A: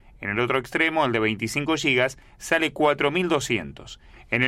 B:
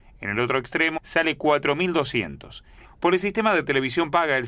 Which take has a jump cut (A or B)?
B